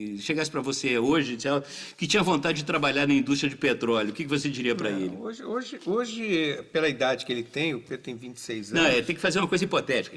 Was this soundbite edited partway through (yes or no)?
no